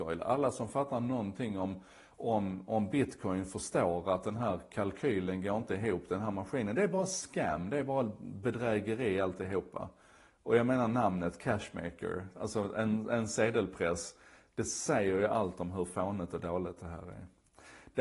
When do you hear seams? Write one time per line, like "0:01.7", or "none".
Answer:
none